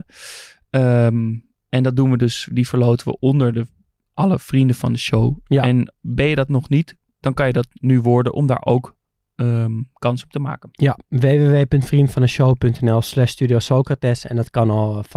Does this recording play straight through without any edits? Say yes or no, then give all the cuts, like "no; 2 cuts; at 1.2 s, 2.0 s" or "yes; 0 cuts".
yes; 0 cuts